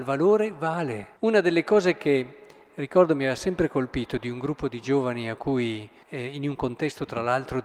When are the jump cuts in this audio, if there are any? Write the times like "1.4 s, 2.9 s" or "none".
1.2 s, 6.0 s